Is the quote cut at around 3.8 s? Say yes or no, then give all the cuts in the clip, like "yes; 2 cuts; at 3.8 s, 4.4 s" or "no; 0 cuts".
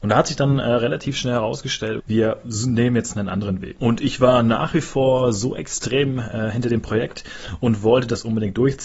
yes; 2 cuts; at 2.0 s, 3.8 s